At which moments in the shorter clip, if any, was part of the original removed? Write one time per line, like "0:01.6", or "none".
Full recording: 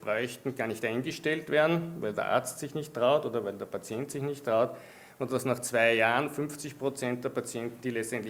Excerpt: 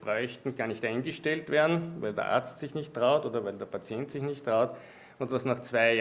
none